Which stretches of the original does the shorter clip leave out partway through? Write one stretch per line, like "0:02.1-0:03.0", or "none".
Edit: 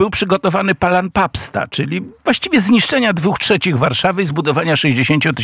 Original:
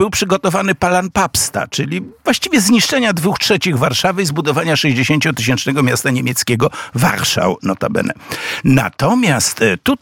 none